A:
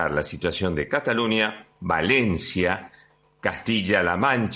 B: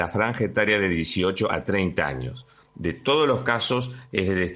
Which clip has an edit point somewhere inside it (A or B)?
B